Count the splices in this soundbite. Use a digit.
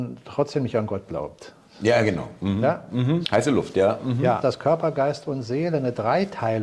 2